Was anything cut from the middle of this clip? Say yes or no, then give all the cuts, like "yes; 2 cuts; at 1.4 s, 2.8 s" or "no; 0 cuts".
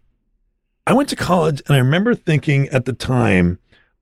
no; 0 cuts